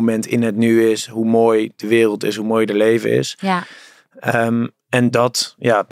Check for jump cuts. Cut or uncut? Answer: uncut